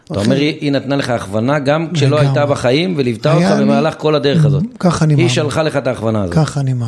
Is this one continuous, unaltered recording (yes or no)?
yes